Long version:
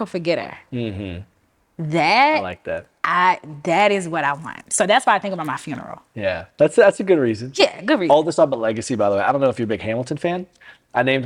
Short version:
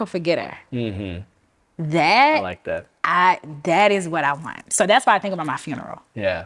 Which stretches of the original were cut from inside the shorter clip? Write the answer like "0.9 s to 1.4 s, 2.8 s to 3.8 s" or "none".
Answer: none